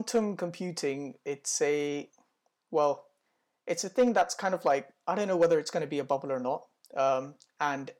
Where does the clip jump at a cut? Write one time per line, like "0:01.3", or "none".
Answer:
none